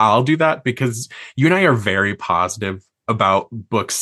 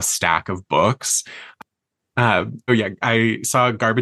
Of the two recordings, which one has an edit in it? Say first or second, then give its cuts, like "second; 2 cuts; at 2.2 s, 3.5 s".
second; 1 cut; at 2.7 s